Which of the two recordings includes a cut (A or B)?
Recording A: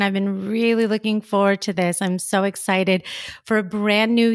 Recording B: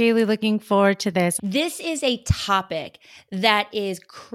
B